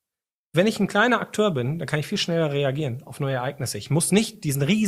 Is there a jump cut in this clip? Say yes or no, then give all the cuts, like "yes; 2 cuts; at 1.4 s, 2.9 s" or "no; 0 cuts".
no; 0 cuts